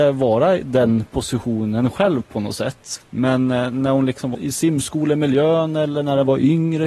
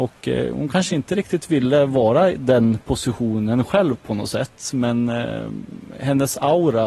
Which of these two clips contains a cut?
first; 2 cuts; at 3.0 s, 4.3 s

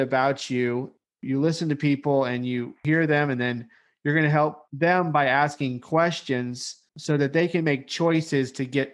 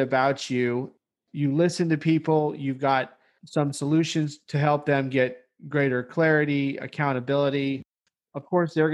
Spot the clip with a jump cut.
first; 2 cuts; at 1.0 s, 6.9 s

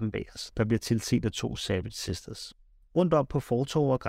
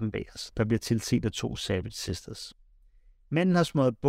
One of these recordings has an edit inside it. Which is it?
first; 1 cut; at 2.8 s

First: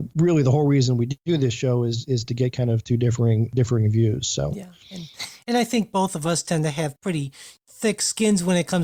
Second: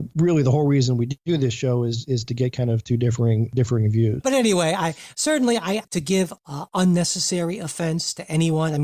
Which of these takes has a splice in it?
second; 2 cuts; at 4.2 s, 5.8 s

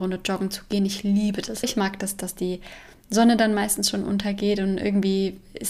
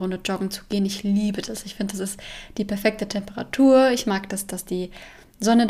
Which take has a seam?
first; 1 cut; at 1.6 s

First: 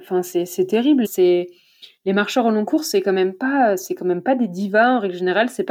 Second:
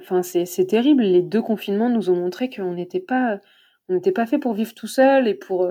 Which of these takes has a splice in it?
first; 1 cut; at 1.0 s

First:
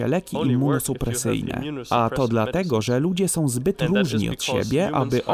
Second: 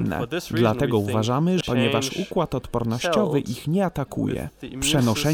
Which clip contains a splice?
second; 1 cut; at 1.6 s

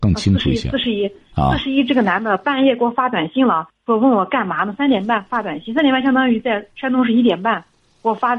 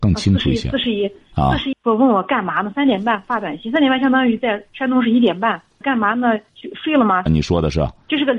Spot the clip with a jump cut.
second; 3 cuts; at 1.7 s, 5.8 s, 7.3 s

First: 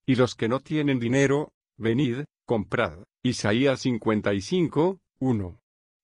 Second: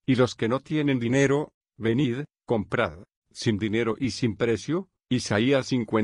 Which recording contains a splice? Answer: first; 1 cut; at 3.1 s

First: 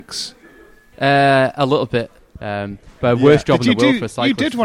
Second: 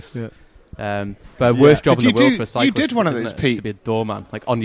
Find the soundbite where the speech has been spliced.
first; 2 cuts; at 0.9 s, 2.2 s

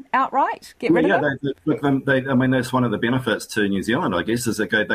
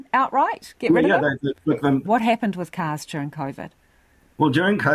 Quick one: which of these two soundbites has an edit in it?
second; 1 cut; at 2.0 s

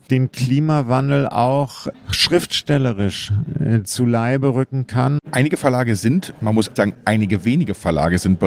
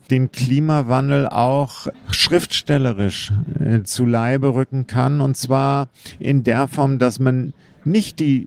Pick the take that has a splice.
first; 2 cuts; at 5.2 s, 6.8 s

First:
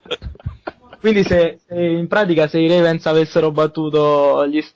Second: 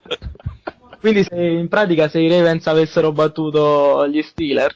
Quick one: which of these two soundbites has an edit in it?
second; 1 cut; at 1.2 s

